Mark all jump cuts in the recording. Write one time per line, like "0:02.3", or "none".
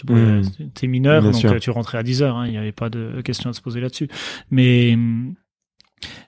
none